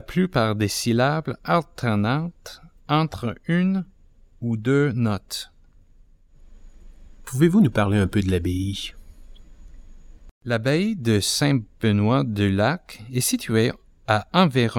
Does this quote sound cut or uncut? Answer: cut